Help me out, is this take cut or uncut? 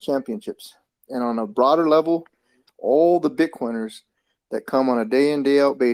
uncut